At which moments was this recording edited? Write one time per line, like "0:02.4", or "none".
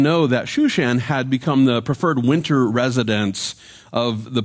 none